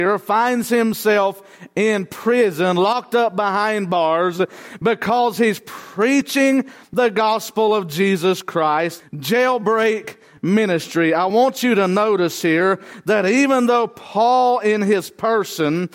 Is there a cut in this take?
yes; 1 cut; at 9.0 s

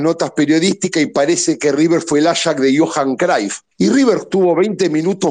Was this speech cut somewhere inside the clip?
yes; 1 cut; at 3.7 s

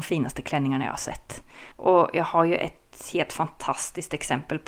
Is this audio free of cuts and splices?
no; 1 cut; at 1.7 s

